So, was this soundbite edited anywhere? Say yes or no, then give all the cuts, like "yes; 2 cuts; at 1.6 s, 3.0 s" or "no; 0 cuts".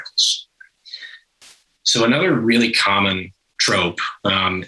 no; 0 cuts